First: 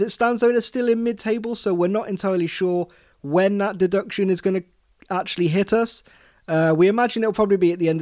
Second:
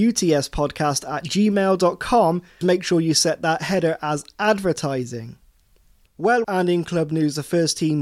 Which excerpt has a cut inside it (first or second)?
second